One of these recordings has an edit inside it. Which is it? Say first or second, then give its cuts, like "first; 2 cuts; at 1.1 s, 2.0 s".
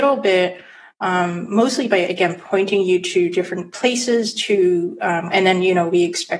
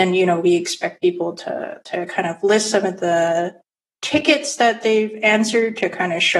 first; 1 cut; at 5.3 s